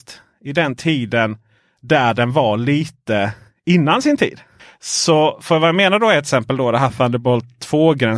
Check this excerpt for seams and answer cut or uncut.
uncut